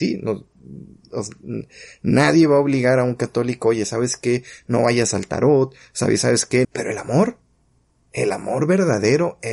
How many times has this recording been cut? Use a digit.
1